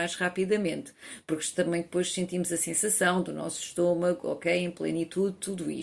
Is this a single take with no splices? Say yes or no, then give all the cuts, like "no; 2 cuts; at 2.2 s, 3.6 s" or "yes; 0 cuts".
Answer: yes; 0 cuts